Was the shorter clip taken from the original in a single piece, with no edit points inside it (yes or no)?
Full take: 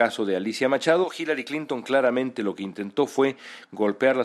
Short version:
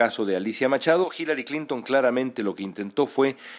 yes